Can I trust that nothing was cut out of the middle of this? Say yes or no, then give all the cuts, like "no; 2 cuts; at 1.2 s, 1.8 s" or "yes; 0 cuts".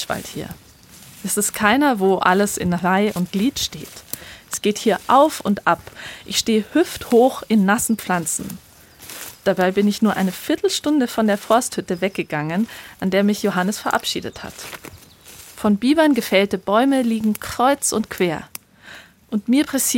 yes; 0 cuts